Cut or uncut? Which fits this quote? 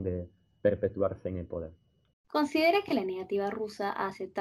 cut